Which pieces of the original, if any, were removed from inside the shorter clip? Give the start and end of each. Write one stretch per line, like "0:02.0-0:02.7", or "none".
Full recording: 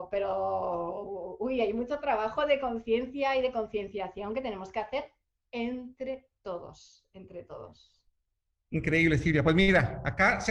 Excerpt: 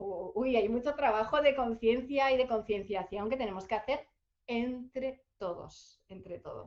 none